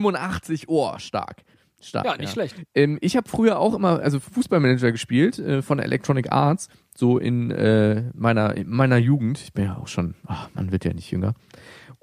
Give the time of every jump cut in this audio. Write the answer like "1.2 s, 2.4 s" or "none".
2.7 s, 4.0 s